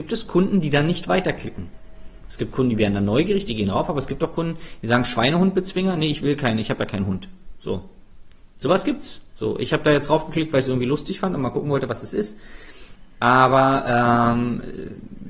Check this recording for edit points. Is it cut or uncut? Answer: uncut